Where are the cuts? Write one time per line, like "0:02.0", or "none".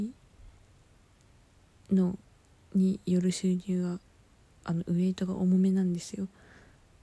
none